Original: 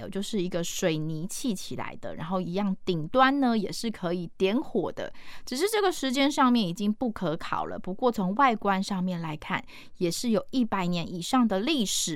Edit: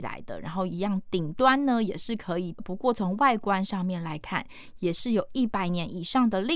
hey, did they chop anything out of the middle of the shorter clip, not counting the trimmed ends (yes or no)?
yes